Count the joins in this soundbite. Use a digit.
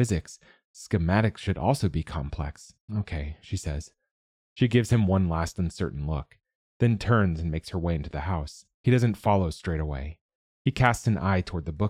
2